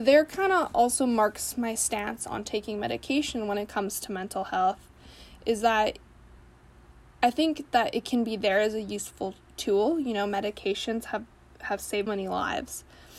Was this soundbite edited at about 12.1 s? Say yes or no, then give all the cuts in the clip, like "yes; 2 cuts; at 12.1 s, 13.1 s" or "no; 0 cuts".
yes; 1 cut; at 12.1 s